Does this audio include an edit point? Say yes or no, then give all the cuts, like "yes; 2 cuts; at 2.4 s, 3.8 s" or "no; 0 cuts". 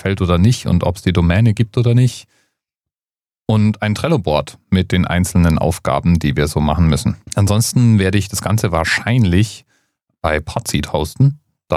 yes; 1 cut; at 7.2 s